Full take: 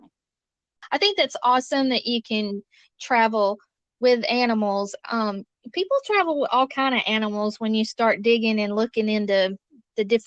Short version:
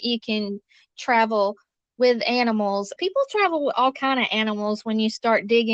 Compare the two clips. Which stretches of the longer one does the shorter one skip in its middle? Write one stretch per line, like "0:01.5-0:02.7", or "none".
0:05.0-0:05.7